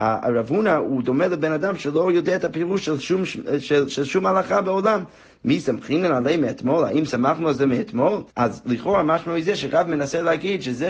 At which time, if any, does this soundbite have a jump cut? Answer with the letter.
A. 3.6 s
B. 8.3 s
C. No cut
B